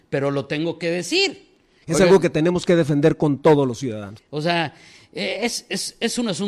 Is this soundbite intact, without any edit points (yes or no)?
no